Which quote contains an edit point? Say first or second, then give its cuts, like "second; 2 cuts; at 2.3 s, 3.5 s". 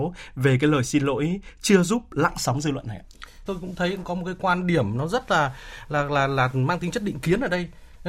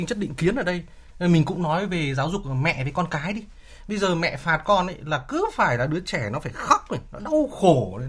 first; 1 cut; at 3.5 s